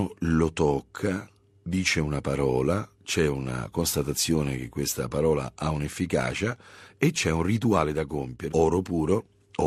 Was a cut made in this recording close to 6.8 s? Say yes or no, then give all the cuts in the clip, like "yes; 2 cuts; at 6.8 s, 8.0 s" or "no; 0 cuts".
no; 2 cuts; at 3.0 s, 8.5 s